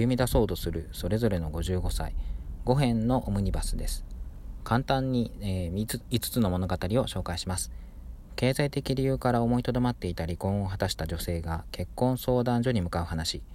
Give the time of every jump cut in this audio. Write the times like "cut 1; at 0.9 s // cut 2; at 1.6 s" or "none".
none